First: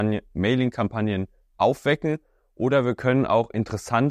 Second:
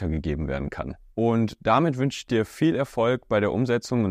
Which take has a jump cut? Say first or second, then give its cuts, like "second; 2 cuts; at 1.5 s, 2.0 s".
second; 1 cut; at 1.1 s